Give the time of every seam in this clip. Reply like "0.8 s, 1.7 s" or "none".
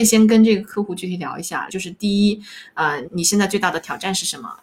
1.7 s, 3.0 s